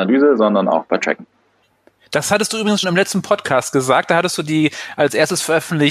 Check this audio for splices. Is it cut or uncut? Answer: cut